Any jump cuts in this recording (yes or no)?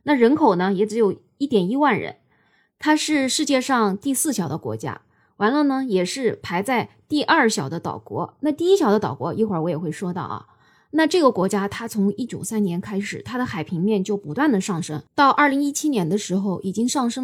yes